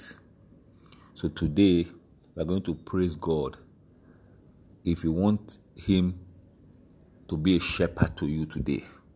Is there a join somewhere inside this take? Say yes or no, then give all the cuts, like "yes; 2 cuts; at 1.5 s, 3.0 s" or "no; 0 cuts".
no; 0 cuts